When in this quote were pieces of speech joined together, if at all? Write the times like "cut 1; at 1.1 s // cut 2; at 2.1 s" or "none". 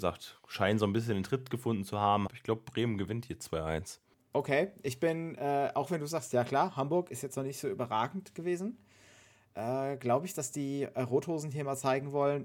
cut 1; at 2.3 s